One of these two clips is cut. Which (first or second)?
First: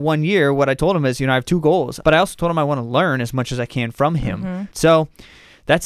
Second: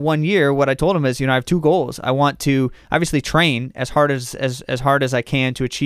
first